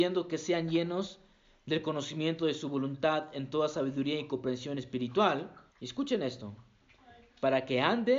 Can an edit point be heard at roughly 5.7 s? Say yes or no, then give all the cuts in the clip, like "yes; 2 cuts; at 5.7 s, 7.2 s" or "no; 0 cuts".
yes; 1 cut; at 5.7 s